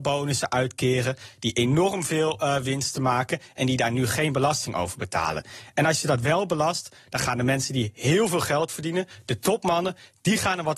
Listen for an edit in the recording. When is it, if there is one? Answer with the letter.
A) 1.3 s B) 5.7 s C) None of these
C